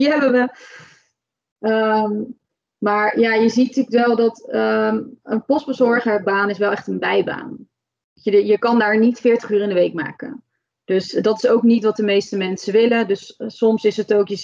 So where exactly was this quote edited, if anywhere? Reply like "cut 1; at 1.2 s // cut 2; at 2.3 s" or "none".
none